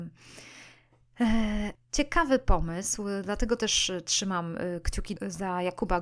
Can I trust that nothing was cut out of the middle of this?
no; 1 cut; at 1.7 s

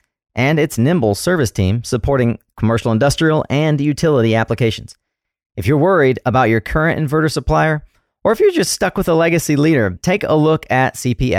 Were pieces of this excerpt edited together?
yes; 1 cut; at 10.0 s

